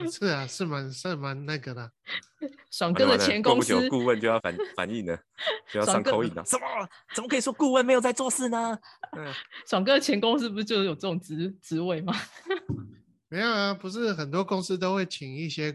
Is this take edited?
yes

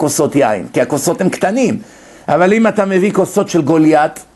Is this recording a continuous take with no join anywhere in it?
yes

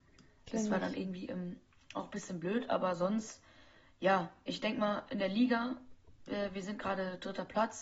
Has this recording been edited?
no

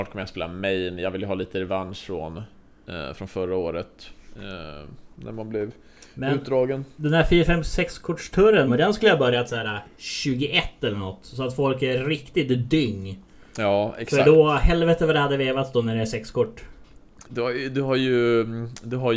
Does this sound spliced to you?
yes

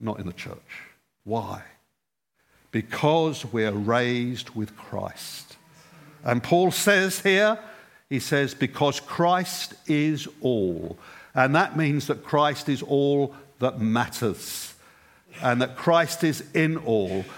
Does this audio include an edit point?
no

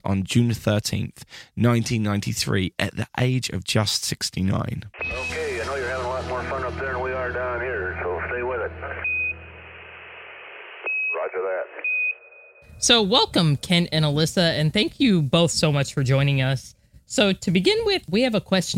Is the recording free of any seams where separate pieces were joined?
yes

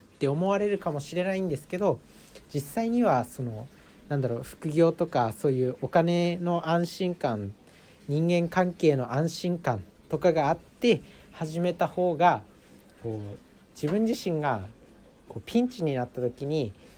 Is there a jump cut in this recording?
no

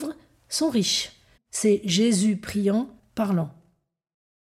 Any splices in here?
yes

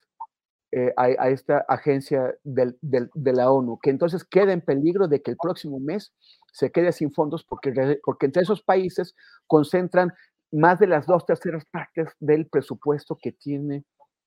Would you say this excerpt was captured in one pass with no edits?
no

